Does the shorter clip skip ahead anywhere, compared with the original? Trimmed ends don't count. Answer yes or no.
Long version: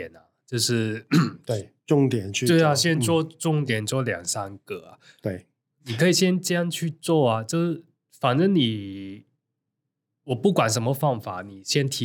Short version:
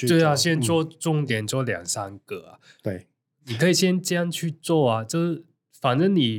no